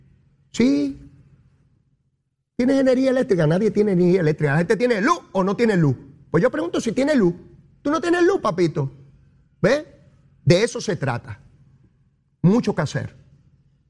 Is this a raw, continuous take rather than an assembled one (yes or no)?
yes